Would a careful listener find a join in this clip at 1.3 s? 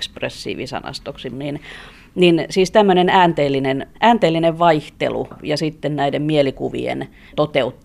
yes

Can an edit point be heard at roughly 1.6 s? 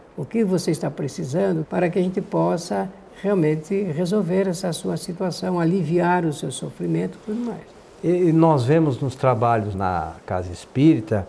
yes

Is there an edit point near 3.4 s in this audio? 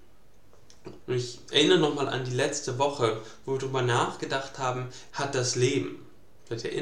no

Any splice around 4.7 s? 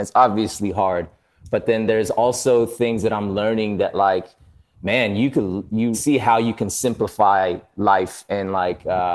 yes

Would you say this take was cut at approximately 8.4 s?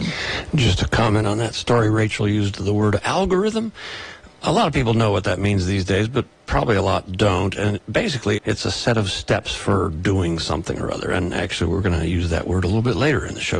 yes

